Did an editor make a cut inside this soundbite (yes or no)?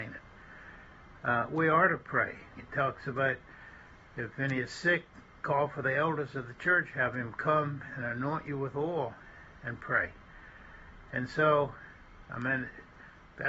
yes